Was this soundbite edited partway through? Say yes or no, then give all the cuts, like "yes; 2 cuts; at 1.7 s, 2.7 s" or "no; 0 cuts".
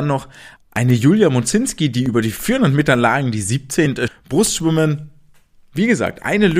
yes; 1 cut; at 4.1 s